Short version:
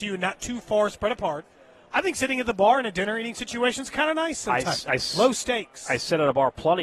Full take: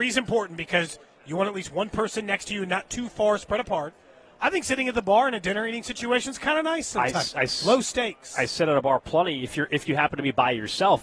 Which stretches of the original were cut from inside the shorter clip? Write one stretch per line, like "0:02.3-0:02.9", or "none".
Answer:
none